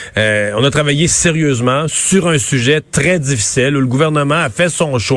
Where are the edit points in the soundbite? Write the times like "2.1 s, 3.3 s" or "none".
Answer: none

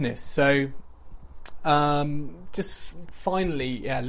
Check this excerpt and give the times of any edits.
none

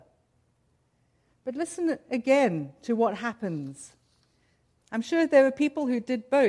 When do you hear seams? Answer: 4.8 s

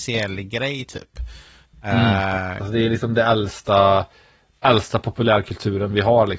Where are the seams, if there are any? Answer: 2.6 s

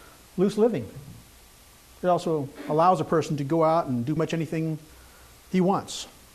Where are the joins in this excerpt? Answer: 4.2 s

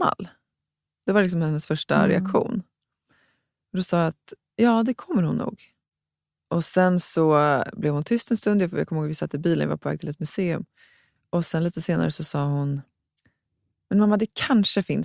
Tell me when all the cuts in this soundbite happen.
none

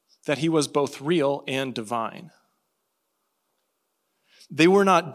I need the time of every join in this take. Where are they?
none

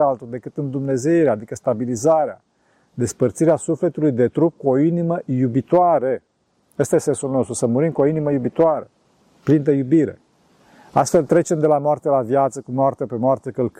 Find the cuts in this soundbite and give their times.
none

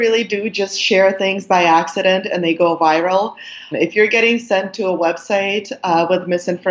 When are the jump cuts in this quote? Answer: 3.7 s

